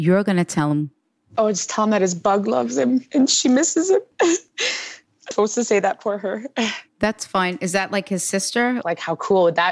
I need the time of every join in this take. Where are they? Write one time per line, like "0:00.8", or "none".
0:05.3
0:08.8